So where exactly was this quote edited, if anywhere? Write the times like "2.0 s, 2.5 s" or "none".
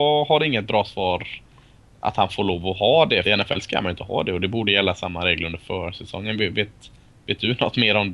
3.3 s